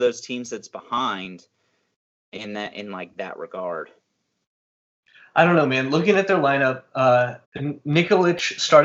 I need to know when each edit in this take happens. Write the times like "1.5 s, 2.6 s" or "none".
7.4 s